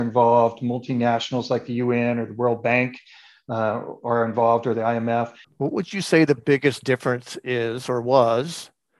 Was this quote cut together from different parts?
yes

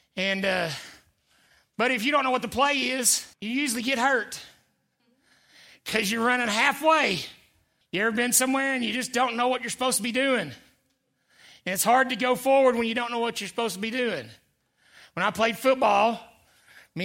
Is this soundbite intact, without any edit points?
no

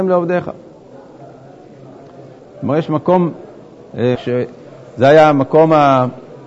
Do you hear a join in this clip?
yes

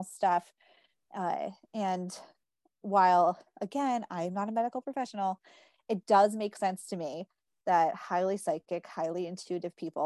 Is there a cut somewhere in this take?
no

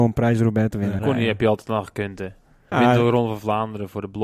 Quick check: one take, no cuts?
no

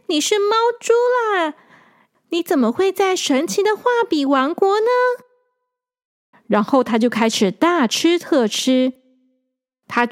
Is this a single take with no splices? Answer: no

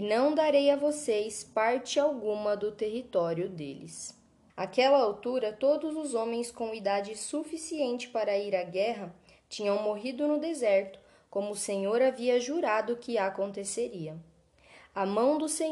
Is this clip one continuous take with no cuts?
no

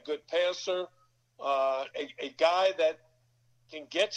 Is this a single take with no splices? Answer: no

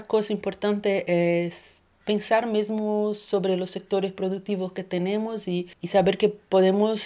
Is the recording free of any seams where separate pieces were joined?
yes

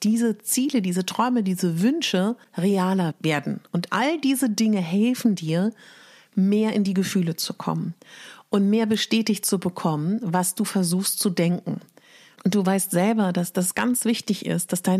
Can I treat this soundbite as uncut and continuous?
no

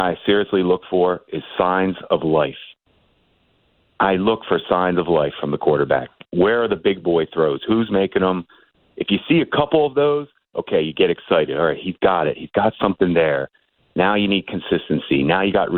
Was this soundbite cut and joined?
no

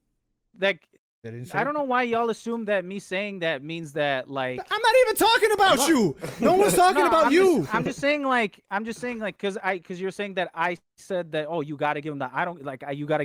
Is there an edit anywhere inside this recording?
no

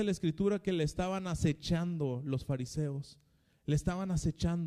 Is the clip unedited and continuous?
yes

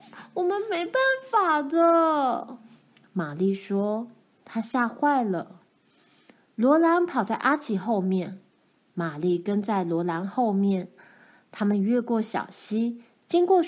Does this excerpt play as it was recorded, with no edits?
yes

